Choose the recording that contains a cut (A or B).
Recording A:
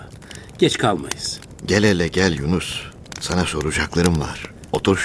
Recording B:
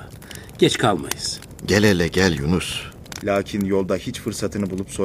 B